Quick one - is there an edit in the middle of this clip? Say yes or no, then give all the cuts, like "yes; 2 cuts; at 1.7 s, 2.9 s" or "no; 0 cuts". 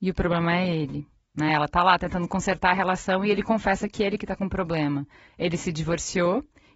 no; 0 cuts